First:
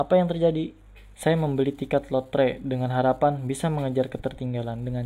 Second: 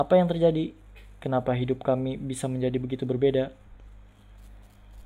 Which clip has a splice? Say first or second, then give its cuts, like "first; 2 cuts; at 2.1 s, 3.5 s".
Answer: first; 1 cut; at 1.1 s